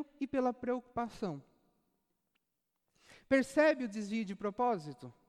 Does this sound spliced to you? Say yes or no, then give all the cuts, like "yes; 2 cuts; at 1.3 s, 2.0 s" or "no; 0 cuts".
no; 0 cuts